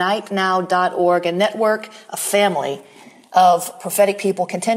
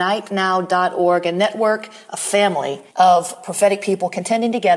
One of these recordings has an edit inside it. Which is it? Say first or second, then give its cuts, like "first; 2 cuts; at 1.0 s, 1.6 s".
second; 1 cut; at 2.9 s